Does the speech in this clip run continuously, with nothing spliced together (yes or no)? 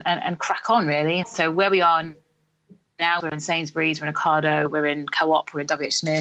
no